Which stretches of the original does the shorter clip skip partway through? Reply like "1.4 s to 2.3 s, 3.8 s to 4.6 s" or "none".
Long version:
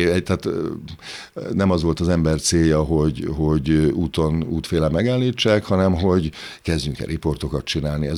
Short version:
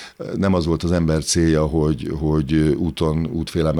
none